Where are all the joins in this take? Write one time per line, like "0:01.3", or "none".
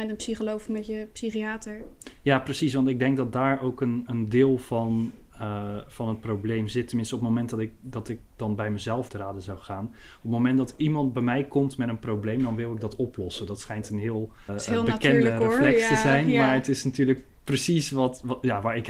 0:09.1
0:14.5